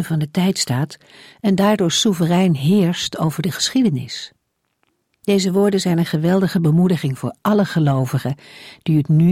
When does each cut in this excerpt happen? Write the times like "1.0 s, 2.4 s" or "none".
none